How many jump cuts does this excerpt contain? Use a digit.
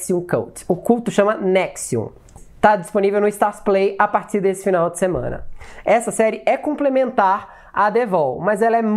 0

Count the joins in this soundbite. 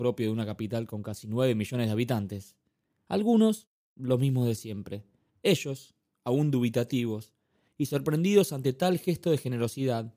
2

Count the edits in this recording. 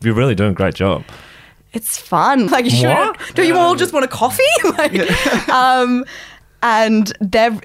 1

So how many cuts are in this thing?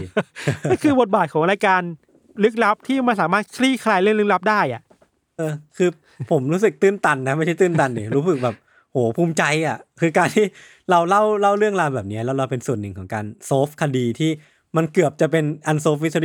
1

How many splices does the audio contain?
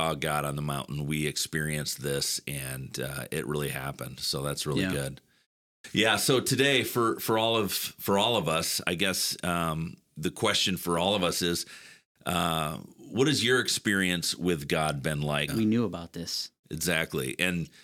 2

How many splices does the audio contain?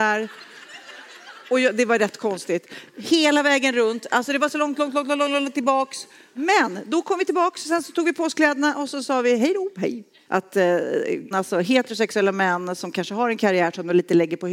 2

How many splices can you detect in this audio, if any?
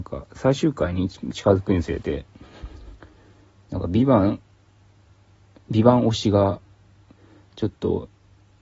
0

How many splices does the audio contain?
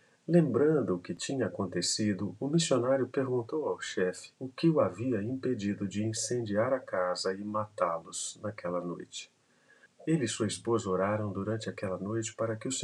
2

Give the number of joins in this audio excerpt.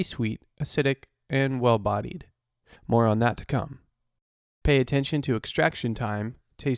2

